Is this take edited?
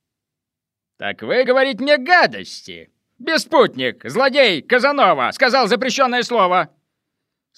no; 0 cuts

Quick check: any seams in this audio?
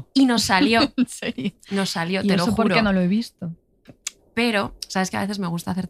yes; 1 cut; at 4.2 s

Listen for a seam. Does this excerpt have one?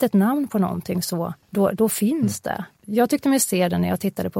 yes; 2 cuts; at 1.4 s, 2.8 s

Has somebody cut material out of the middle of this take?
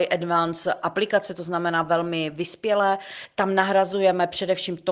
no; 0 cuts

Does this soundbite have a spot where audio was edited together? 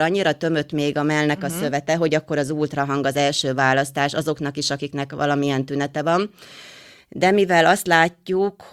no; 0 cuts

